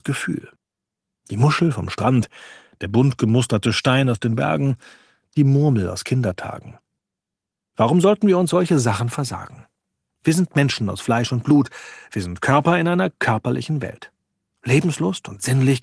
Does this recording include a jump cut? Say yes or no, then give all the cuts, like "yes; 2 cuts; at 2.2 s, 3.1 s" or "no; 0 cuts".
no; 0 cuts